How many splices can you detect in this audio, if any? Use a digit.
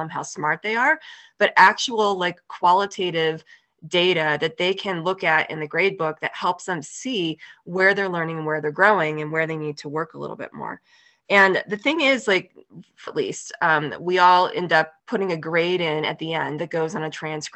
2